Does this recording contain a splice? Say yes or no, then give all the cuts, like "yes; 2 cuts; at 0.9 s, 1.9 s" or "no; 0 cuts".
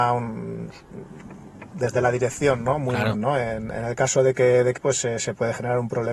yes; 2 cuts; at 3.1 s, 4.8 s